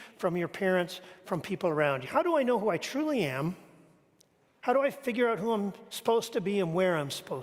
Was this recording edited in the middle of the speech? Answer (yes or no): yes